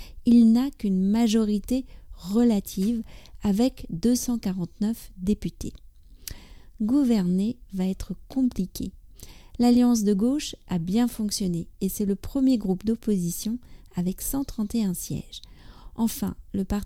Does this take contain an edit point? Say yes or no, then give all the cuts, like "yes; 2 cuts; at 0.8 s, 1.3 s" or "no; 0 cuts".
no; 0 cuts